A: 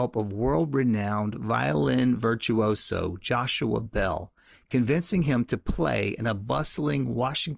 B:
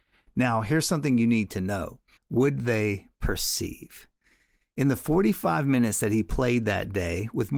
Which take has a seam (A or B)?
B